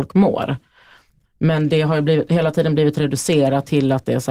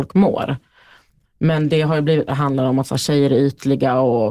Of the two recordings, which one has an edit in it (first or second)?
second